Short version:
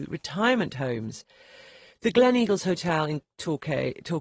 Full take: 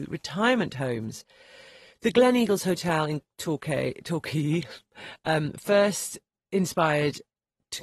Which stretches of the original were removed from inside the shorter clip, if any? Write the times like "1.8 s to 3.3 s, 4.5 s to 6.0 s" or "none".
none

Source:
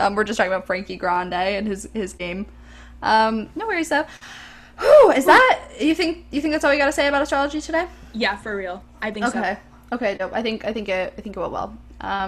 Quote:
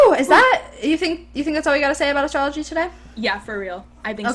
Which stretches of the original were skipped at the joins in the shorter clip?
none

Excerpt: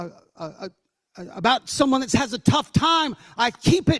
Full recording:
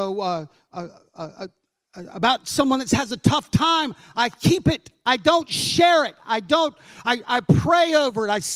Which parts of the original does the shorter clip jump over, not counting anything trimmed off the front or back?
none

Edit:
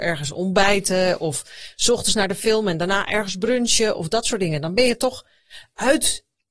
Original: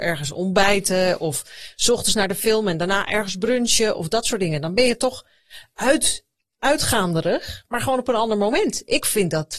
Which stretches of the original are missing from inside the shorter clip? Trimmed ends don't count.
none

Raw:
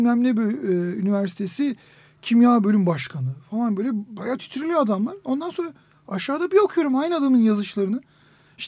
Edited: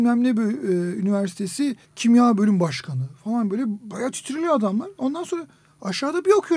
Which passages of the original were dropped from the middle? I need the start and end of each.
1.8 s to 2.1 s

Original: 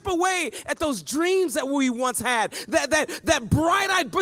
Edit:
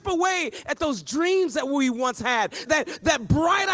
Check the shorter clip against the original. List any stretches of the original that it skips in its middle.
2.7 s to 2.9 s

